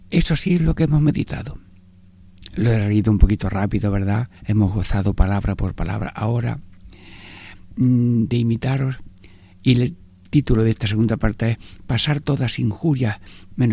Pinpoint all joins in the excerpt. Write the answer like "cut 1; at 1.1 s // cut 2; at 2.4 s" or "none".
cut 1; at 4.4 s